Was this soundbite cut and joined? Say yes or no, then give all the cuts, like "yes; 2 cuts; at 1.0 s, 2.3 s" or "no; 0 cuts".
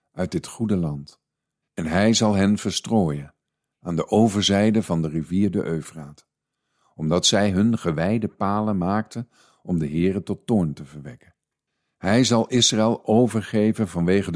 yes; 1 cut; at 1.6 s